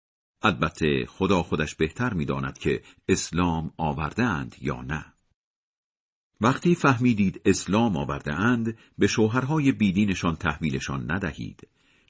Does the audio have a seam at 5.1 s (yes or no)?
no